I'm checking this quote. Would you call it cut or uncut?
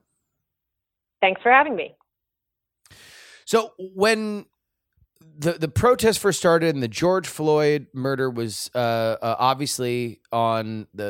uncut